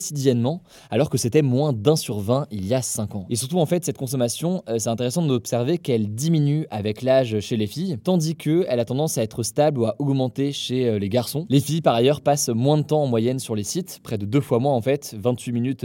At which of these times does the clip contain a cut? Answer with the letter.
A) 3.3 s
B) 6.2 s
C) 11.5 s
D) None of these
A